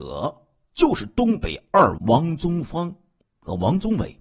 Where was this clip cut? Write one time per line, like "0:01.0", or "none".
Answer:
0:02.0